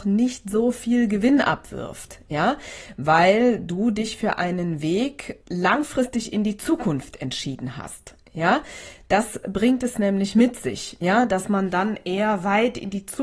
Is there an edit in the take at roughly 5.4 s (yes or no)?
yes